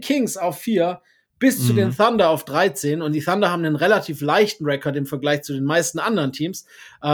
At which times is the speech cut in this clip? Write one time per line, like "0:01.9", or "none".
none